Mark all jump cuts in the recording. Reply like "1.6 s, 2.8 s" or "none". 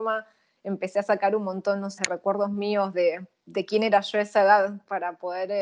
2.0 s